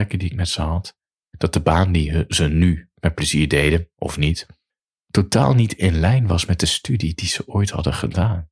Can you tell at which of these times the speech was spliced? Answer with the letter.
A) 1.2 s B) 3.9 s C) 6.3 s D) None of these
D